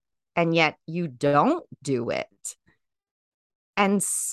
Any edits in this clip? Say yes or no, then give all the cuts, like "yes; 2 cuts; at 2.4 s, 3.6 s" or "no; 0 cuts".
no; 0 cuts